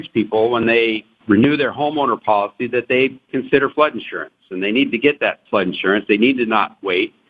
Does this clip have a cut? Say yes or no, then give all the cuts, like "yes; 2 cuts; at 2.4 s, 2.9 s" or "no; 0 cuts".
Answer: no; 0 cuts